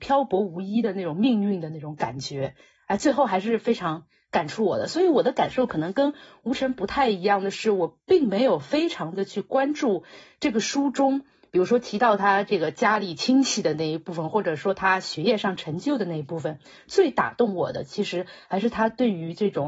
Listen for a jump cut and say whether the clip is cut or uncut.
uncut